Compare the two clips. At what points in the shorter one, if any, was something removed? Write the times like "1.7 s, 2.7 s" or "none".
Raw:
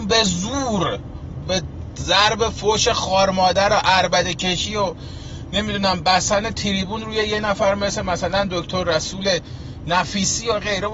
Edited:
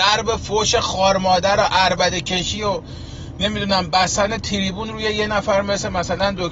none